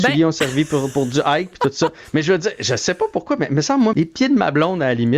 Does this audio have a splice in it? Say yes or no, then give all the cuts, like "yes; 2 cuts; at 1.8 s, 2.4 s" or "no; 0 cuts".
yes; 2 cuts; at 1.5 s, 3.9 s